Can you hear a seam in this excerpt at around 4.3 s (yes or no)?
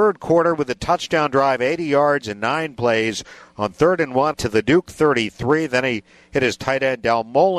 yes